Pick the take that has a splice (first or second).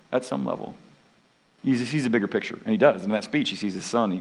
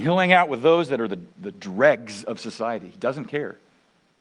second